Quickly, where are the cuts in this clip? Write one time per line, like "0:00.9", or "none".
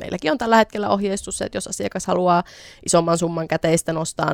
none

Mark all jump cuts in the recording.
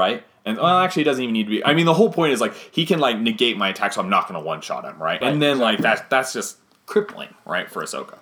none

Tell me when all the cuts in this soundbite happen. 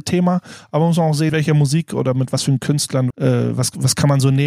0:01.3
0:03.1

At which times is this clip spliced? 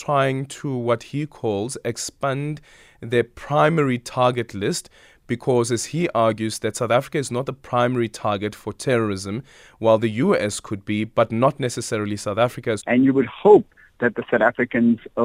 0:12.8

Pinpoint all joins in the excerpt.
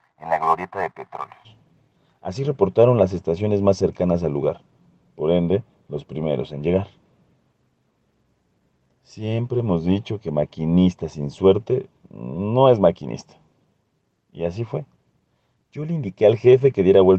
none

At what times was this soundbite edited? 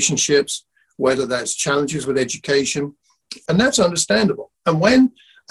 0:03.5

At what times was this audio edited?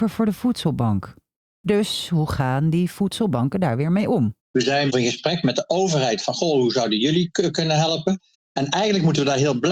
0:04.4
0:08.3

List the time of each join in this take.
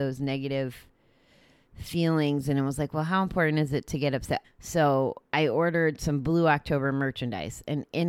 0:04.4

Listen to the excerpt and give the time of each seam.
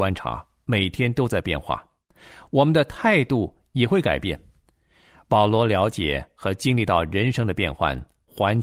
none

